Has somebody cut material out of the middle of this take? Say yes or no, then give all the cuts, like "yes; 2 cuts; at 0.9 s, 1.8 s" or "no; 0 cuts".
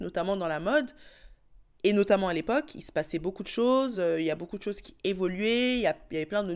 no; 0 cuts